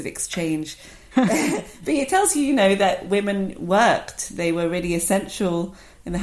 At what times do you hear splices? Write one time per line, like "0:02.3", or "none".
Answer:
0:01.1